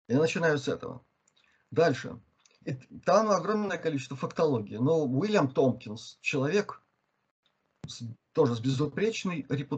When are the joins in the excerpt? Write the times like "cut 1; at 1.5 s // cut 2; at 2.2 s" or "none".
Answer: none